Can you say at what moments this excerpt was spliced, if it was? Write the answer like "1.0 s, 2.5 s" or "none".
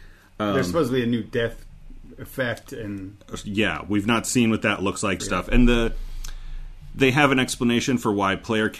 5.2 s